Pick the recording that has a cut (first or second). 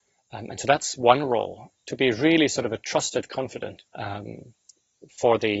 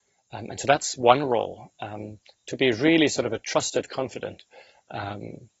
first